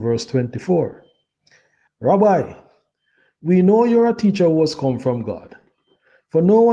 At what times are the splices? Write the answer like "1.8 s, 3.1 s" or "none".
1.9 s